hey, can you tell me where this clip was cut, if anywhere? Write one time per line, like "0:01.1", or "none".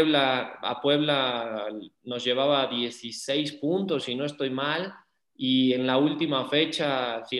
none